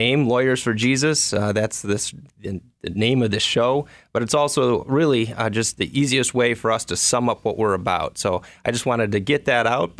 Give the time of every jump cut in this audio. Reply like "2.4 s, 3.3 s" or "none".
none